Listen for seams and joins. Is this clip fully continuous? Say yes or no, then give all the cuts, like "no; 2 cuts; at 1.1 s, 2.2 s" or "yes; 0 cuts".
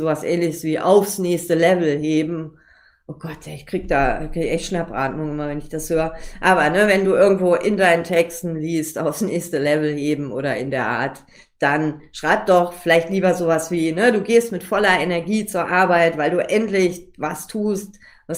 yes; 0 cuts